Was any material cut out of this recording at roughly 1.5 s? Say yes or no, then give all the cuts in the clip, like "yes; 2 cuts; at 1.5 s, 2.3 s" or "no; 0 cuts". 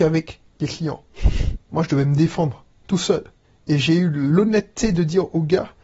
yes; 1 cut; at 1.5 s